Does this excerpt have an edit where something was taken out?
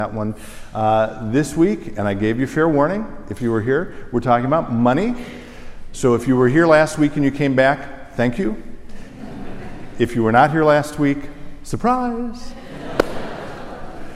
no; 0 cuts

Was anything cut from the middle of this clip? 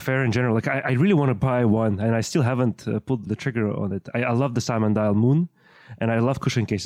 yes; 1 cut; at 3.3 s

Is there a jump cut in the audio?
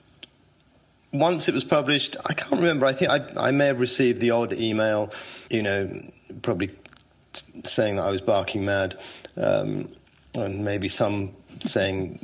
yes; 1 cut; at 5.5 s

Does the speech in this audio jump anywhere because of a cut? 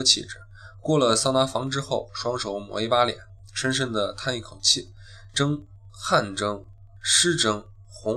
no; 0 cuts

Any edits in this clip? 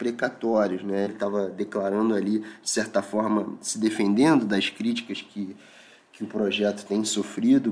yes; 1 cut; at 1.1 s

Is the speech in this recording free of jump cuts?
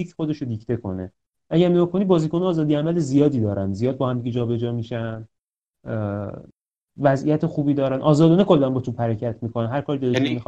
yes; 0 cuts

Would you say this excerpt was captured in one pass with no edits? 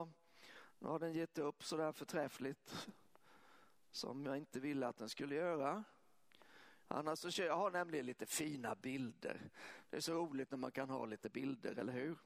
no; 1 cut; at 6.8 s

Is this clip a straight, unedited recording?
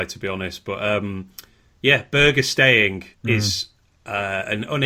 no; 1 cut; at 3.1 s

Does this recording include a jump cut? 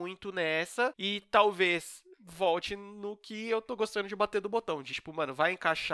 no; 0 cuts

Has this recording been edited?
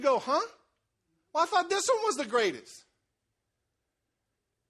no; 0 cuts

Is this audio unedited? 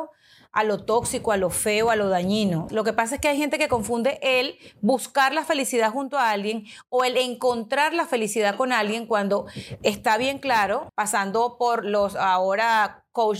no; 2 cuts; at 2.7 s, 10.9 s

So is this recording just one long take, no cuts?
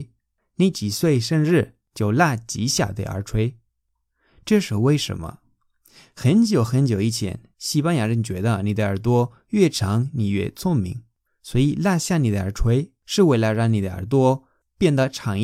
yes; 0 cuts

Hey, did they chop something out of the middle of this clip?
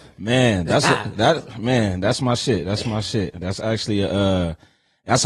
no; 0 cuts

